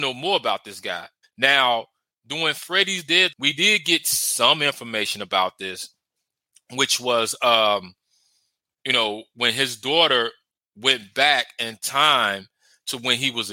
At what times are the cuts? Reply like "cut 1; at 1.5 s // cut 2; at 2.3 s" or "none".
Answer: cut 1; at 1.2 s // cut 2; at 3.3 s